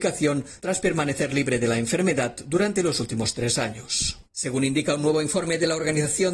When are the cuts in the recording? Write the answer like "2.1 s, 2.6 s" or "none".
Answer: 4.2 s